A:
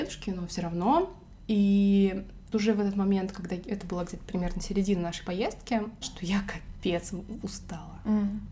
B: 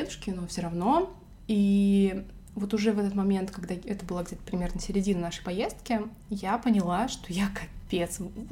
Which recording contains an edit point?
A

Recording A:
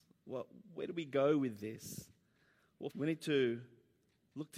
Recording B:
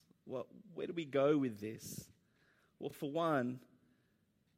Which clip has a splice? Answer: A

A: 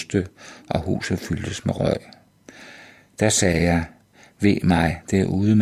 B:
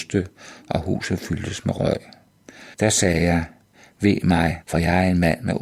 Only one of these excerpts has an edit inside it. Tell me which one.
B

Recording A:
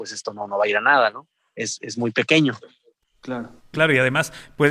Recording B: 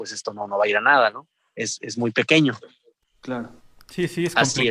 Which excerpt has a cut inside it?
A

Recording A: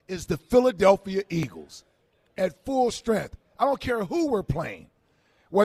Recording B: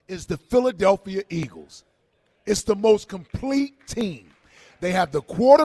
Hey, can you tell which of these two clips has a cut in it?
A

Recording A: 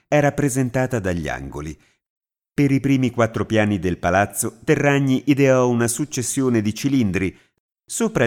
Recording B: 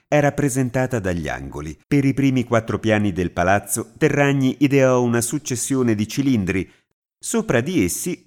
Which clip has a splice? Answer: B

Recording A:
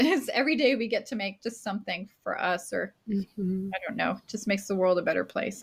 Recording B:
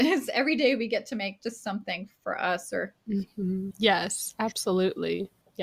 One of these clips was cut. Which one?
B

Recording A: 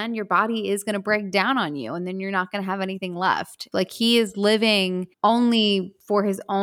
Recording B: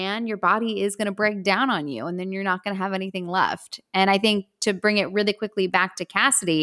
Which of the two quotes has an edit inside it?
A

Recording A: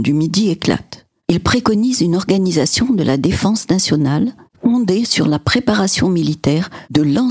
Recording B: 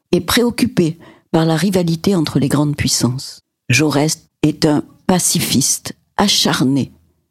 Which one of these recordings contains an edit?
A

